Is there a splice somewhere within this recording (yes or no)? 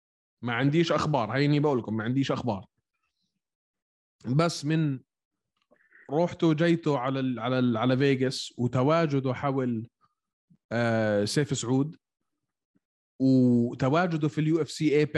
no